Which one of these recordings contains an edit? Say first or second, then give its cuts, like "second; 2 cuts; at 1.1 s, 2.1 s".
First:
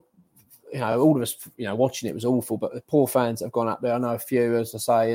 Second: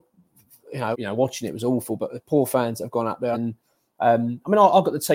second; 2 cuts; at 0.9 s, 3.3 s